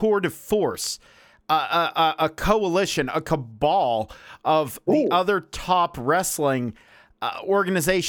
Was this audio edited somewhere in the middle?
no; 0 cuts

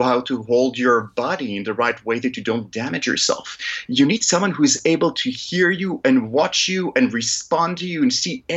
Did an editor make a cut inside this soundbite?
no; 0 cuts

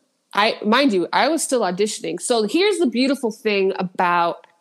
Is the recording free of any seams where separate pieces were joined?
yes; 0 cuts

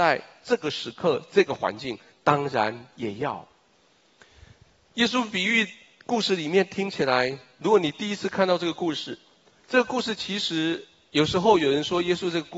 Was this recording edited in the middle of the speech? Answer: no; 0 cuts

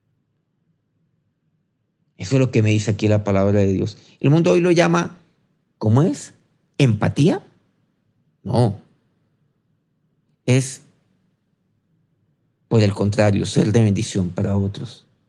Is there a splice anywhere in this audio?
no; 0 cuts

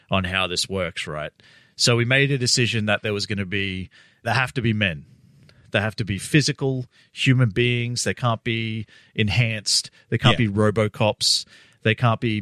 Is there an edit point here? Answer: yes; 1 cut; at 4.2 s

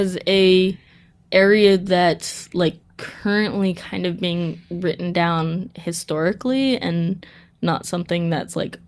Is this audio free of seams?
yes; 0 cuts

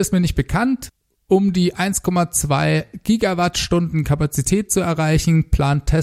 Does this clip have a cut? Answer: no; 0 cuts

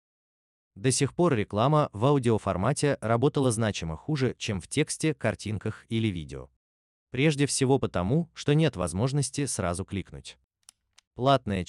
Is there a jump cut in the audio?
no; 0 cuts

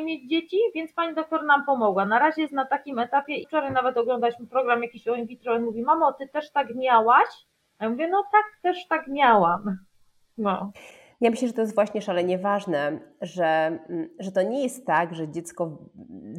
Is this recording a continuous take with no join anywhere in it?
yes; 0 cuts

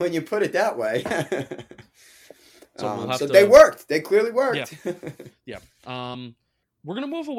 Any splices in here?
no; 0 cuts

